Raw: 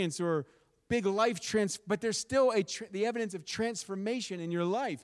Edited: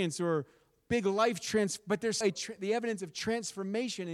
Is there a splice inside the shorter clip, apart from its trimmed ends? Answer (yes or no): yes